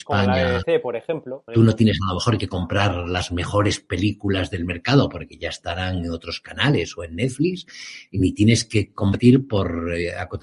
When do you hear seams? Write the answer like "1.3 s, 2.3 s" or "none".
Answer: 1.5 s